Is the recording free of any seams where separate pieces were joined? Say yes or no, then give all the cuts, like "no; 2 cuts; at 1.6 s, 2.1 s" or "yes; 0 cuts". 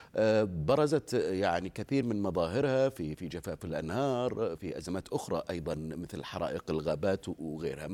no; 2 cuts; at 3.2 s, 4.6 s